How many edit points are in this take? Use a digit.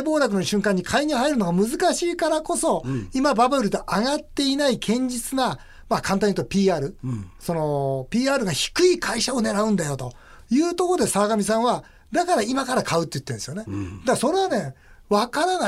0